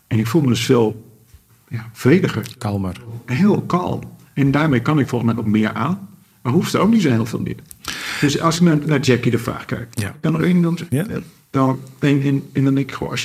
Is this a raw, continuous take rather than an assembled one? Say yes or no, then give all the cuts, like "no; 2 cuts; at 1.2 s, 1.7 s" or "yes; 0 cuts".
yes; 0 cuts